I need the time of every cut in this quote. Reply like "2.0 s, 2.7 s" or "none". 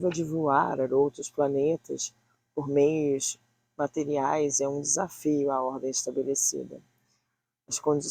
none